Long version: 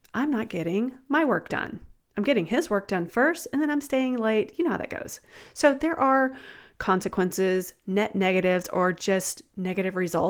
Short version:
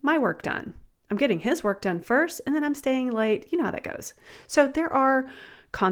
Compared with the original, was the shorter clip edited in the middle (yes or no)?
no